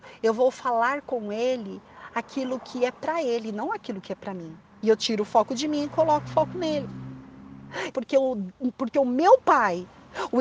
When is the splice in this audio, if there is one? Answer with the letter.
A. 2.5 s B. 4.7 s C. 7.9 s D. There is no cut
C